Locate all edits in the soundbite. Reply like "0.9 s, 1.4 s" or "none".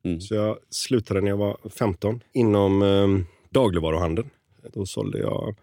2.2 s